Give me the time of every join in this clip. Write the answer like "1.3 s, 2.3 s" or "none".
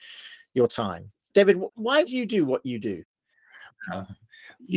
3.7 s

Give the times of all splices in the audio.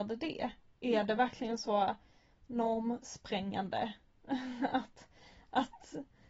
none

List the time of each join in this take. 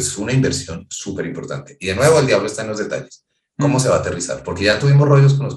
none

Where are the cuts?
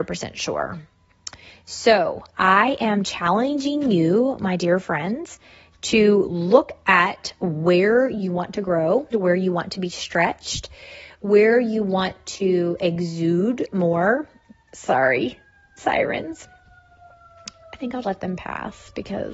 9.1 s, 18.0 s

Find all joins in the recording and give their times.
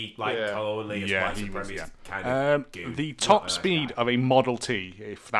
none

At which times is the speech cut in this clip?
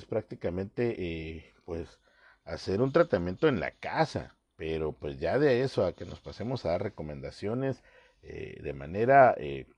none

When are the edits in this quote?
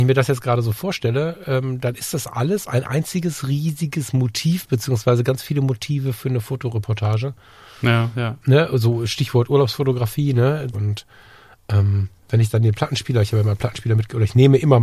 10.7 s

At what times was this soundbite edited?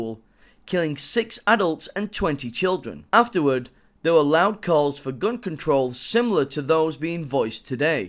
3.1 s

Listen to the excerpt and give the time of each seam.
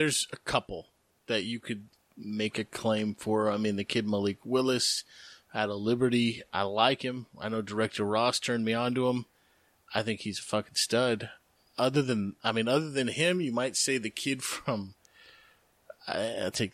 none

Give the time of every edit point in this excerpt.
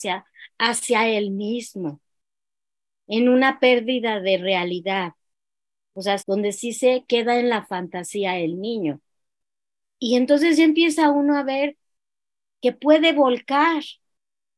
6.2 s, 9.8 s

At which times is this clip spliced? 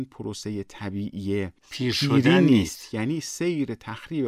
1.6 s

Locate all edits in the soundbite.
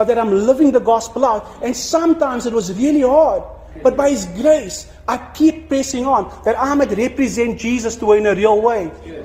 none

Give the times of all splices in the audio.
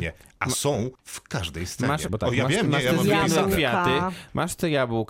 1.0 s, 2.1 s

